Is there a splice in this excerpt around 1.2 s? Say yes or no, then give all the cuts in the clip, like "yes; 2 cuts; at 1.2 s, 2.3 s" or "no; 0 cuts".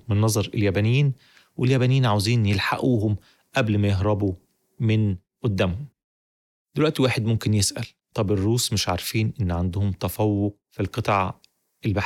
no; 0 cuts